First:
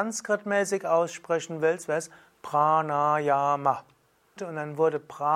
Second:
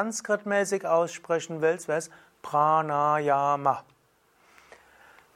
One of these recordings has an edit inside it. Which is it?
first; 1 cut; at 4.4 s

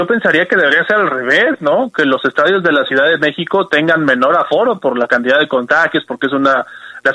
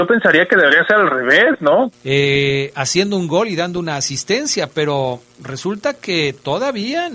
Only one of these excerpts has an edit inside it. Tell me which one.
second; 1 cut; at 1.9 s

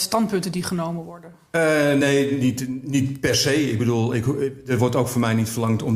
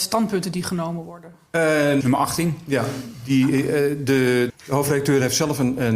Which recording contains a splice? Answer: second; 2 cuts; at 2.0 s, 4.5 s

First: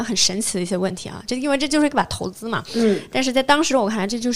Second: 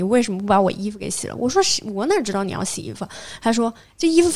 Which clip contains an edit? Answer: first; 1 cut; at 1.3 s

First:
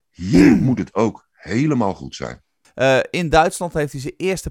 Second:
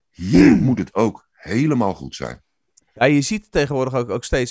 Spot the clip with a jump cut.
first; 1 cut; at 2.6 s

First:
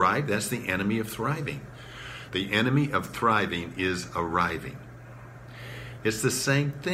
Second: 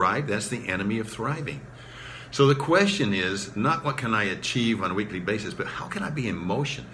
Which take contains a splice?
first; 2 cuts; at 2.3 s, 6.0 s

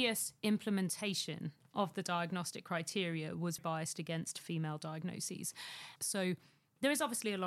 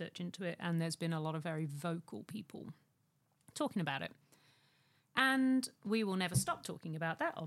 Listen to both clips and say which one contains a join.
first; 2 cuts; at 3.6 s, 6.0 s

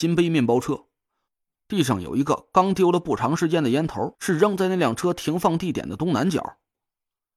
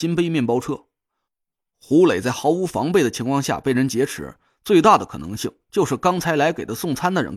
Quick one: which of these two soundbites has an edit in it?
first; 2 cuts; at 1.5 s, 4.1 s

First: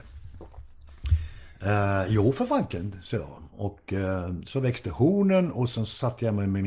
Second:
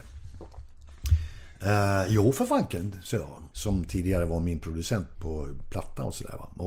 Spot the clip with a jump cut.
second; 2 cuts; at 3.5 s, 5.2 s

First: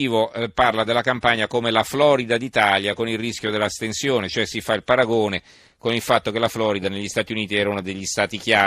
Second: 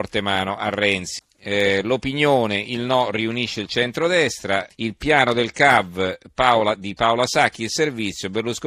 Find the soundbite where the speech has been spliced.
second; 2 cuts; at 1.2 s, 4.7 s

